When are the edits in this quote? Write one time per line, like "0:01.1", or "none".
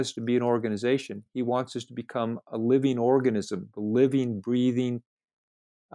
none